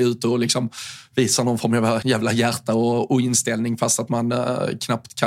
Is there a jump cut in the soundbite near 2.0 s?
yes; 1 cut; at 2.0 s

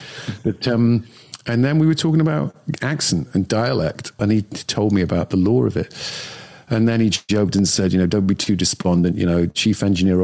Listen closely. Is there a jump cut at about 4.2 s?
yes; 1 cut; at 4.2 s

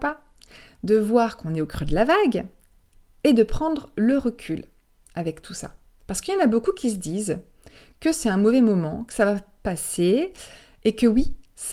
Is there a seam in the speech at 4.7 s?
no; 1 cut; at 6.0 s

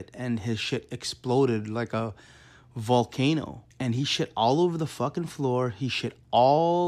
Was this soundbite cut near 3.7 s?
yes; 1 cut; at 3.7 s

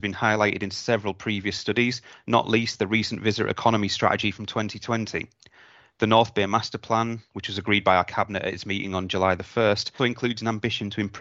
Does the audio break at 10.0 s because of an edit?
yes; 1 cut; at 10.0 s

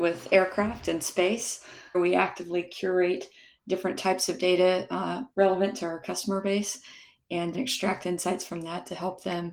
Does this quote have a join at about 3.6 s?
no; 3 cuts; at 1.9 s, 5.3 s, 7.5 s

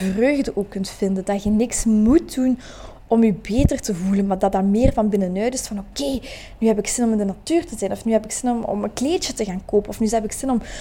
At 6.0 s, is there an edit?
no; 0 cuts

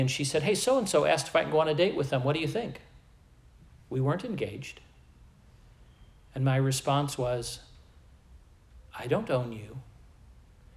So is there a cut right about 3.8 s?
no; 0 cuts

